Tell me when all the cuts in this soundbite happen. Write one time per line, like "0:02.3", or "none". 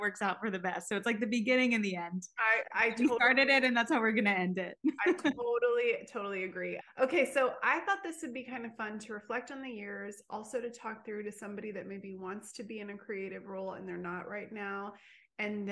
0:06.8